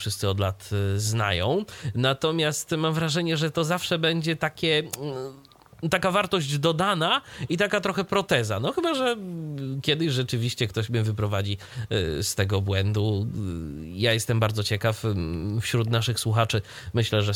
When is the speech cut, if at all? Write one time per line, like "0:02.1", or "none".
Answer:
none

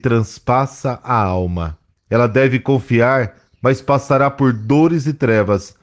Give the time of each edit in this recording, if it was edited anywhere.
0:02.0

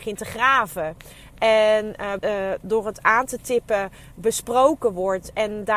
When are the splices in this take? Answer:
0:02.2

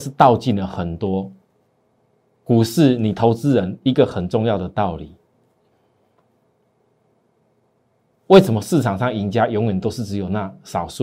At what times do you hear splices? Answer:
none

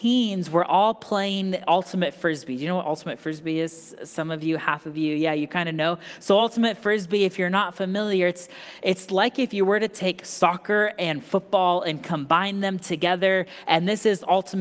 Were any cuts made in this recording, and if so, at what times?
none

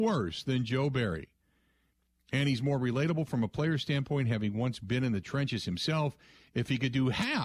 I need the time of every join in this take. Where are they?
none

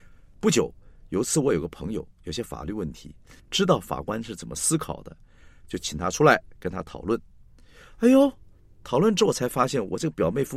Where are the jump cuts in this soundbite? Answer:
0:03.4

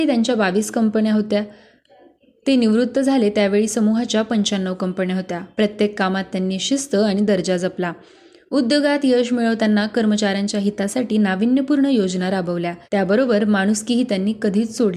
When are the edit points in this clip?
0:12.8

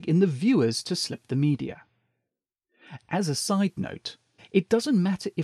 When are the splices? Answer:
0:04.4

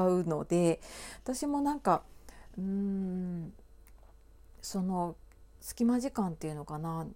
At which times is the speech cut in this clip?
none

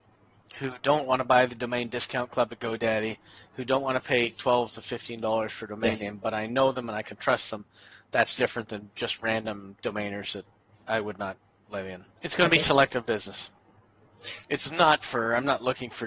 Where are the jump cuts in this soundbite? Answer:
0:12.2
0:14.4

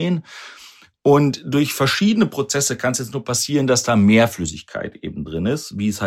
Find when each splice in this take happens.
none

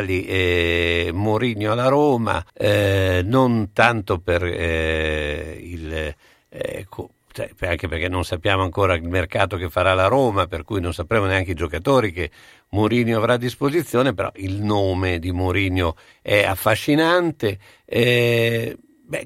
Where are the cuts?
0:02.5

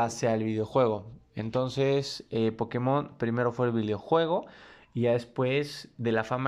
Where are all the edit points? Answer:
none

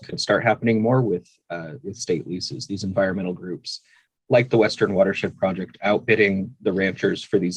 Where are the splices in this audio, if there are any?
none

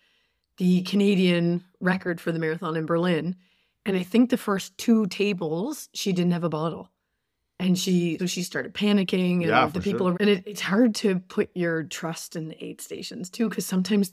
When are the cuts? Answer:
0:08.2
0:10.1

